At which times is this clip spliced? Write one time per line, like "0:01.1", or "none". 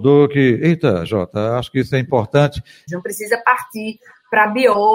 0:02.9